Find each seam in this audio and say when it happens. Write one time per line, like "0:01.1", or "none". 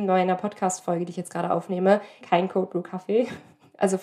0:02.2